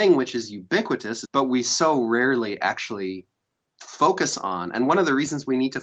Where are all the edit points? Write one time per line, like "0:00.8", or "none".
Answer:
0:01.3